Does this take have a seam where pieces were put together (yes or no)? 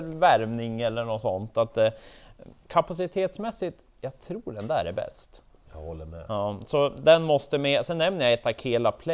no